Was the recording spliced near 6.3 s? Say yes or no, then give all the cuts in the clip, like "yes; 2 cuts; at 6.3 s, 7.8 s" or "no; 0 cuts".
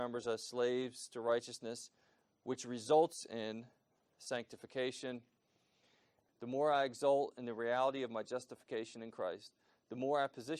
yes; 1 cut; at 6.3 s